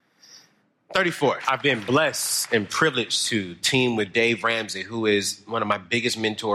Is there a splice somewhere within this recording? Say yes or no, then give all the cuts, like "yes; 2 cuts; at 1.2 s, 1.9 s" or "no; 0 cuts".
yes; 1 cut; at 1.4 s